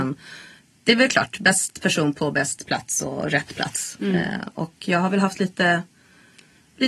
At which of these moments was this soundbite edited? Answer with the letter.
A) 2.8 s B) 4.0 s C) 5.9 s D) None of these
D